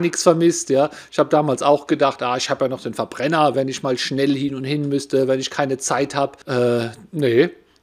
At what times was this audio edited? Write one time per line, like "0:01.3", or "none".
0:03.5
0:06.4